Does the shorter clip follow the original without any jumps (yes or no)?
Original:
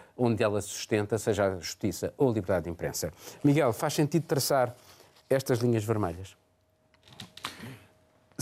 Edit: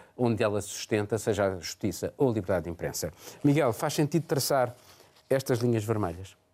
yes